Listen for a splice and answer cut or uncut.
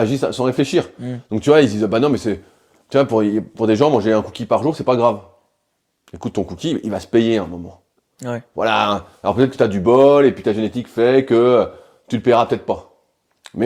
uncut